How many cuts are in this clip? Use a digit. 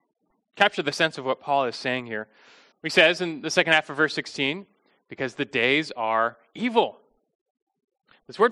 1